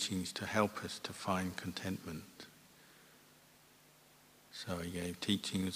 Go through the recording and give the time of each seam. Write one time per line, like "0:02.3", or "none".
none

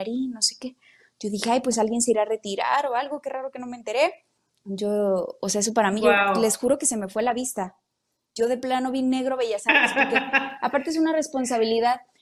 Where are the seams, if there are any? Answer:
0:04.5

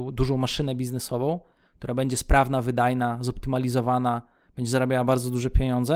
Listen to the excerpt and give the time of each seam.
none

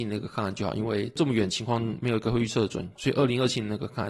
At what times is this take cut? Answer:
0:03.0

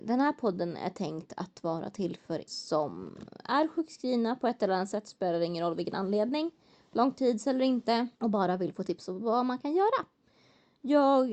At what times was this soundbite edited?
0:02.5
0:08.2

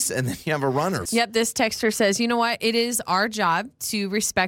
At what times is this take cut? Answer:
0:01.1

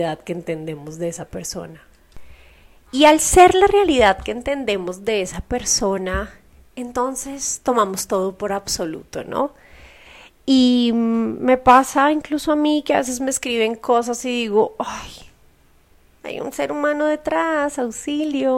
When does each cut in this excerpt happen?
none

